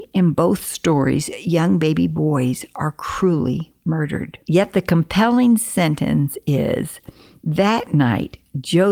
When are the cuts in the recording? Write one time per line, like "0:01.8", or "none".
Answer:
0:04.4